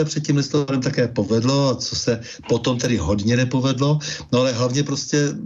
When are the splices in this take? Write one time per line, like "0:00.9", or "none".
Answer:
none

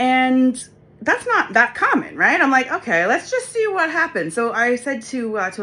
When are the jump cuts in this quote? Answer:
none

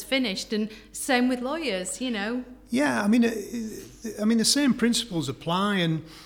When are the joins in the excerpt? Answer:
none

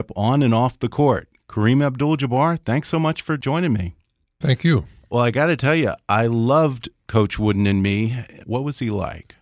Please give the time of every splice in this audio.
0:04.4
0:08.4

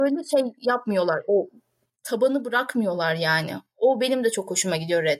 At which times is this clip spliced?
none

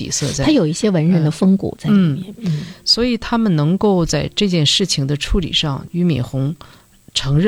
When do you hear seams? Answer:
none

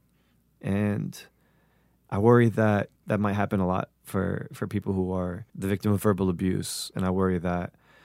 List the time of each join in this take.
0:03.0
0:05.5

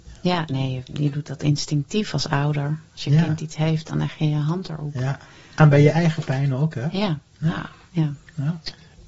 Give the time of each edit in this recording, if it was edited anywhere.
0:01.0

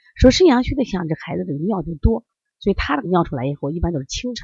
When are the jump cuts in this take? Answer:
0:03.0

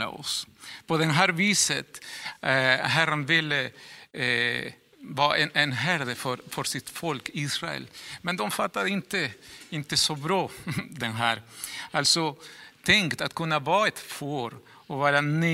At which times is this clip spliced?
none

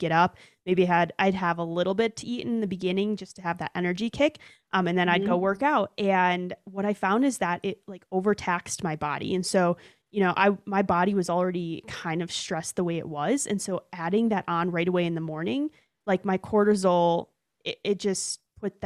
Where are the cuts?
none

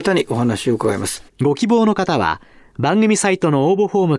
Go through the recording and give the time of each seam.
0:01.3

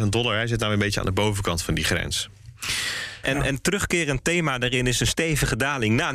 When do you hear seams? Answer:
0:03.2

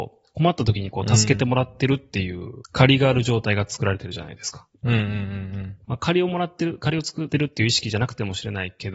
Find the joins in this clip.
0:05.8

